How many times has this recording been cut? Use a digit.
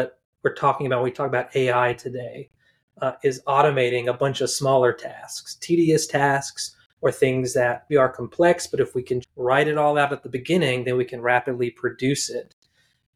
2